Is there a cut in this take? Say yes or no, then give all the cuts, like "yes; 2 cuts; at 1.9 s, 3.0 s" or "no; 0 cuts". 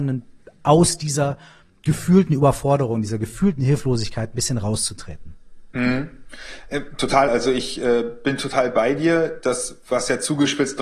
no; 0 cuts